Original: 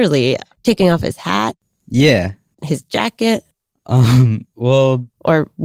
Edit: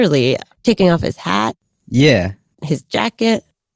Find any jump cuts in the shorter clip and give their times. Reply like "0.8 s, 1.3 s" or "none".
none